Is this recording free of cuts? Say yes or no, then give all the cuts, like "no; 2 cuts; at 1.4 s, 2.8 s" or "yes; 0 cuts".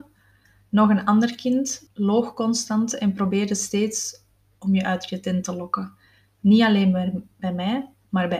no; 1 cut; at 1.9 s